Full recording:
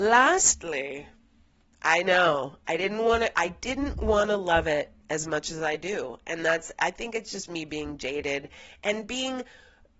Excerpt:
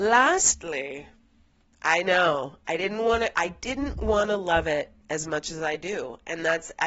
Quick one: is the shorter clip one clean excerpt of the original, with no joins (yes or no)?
yes